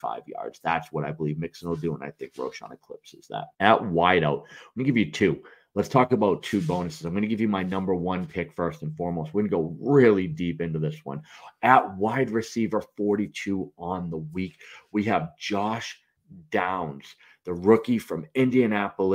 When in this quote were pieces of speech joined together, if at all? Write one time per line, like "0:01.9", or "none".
0:03.5